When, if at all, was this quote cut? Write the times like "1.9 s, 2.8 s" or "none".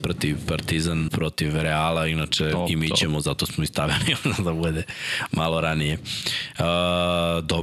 1.1 s